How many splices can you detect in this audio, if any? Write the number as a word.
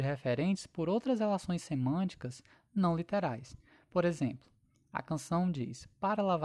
zero